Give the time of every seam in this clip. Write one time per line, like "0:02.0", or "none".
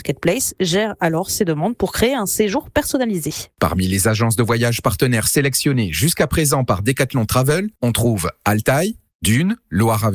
none